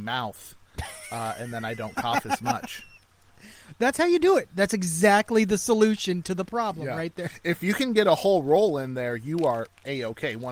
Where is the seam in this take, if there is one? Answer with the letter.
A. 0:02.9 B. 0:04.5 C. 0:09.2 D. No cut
D